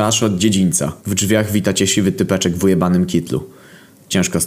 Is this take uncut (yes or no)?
no